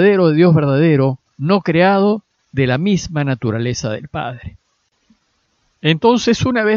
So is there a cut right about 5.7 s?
no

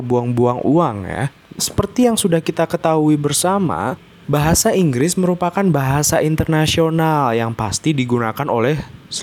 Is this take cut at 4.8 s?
no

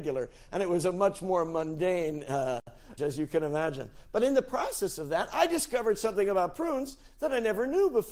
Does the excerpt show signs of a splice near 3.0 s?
yes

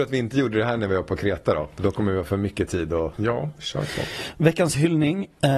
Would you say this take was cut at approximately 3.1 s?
yes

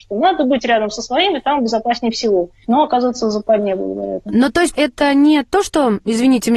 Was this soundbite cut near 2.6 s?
yes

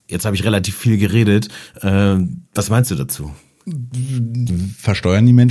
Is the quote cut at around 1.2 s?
no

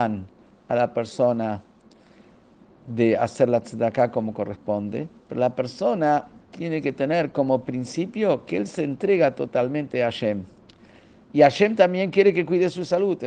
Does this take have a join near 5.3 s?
yes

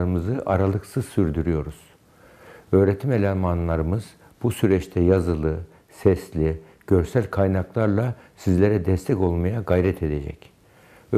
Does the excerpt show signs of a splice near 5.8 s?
no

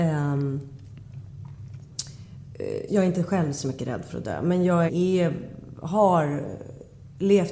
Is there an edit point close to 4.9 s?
yes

